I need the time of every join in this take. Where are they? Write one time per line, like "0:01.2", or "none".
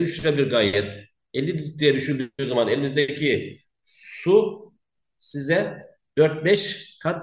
none